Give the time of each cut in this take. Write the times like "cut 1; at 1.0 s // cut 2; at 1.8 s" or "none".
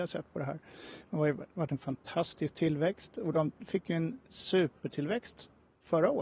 cut 1; at 1.0 s